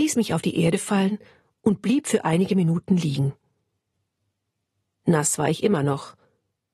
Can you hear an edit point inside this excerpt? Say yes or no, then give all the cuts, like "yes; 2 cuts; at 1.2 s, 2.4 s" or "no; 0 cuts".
no; 0 cuts